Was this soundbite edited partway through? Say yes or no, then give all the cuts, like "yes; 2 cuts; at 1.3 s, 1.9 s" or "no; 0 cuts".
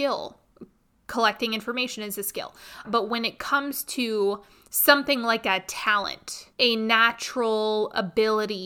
yes; 2 cuts; at 2.8 s, 6.5 s